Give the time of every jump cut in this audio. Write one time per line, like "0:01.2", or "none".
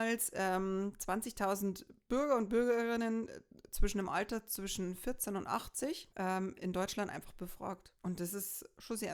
0:06.1